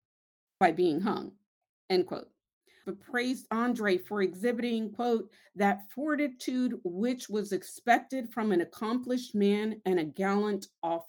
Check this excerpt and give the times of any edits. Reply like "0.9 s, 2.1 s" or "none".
2.8 s